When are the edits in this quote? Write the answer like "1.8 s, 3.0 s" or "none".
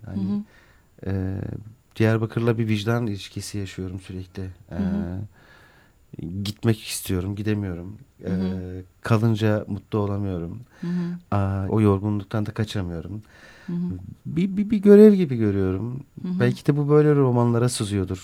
11.7 s